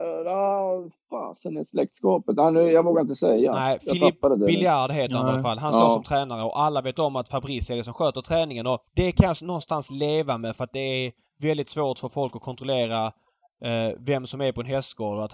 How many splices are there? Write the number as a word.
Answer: one